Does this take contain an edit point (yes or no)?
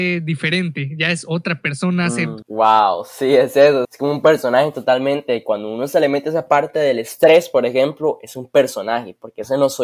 yes